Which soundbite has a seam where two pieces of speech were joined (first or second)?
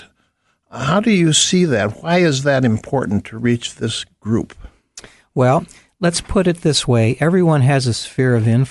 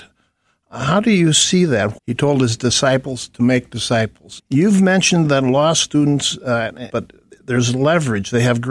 second